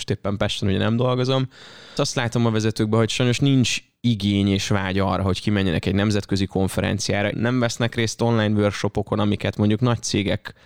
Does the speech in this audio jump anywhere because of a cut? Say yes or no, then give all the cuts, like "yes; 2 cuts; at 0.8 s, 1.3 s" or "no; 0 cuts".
yes; 2 cuts; at 2.0 s, 7.3 s